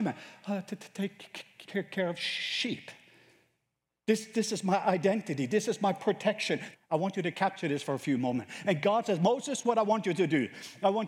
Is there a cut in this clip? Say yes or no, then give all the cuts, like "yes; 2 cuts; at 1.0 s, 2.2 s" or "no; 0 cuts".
yes; 2 cuts; at 1.6 s, 6.7 s